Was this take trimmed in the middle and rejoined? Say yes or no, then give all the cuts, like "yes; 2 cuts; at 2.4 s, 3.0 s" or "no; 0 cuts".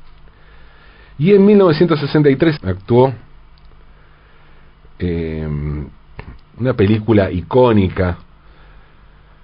yes; 2 cuts; at 2.6 s, 6.4 s